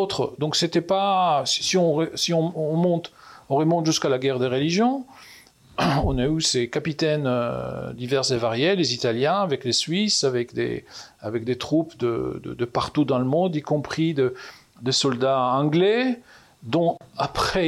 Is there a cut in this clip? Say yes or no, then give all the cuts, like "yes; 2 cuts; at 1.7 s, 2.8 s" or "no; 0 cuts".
no; 0 cuts